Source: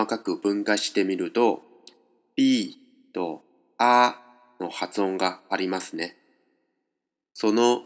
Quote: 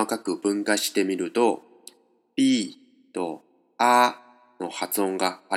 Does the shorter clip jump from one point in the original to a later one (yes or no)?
no